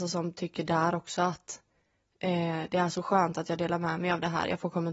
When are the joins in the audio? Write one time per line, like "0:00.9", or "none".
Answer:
none